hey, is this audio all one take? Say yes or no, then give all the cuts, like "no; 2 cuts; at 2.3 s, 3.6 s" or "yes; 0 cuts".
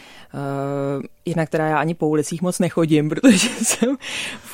yes; 0 cuts